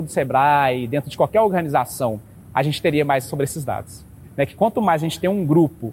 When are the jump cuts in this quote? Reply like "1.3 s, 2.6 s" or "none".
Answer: 2.5 s